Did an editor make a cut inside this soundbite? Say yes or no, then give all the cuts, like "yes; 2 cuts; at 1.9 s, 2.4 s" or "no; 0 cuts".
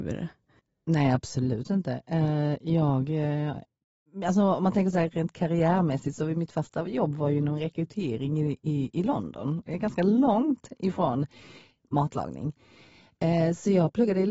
no; 0 cuts